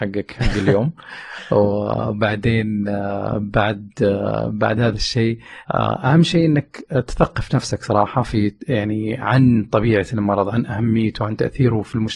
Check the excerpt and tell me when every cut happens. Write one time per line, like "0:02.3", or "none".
none